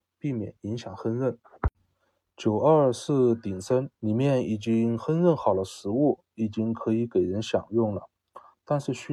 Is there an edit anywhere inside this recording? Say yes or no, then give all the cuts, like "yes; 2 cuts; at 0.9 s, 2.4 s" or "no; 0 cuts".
yes; 1 cut; at 3.9 s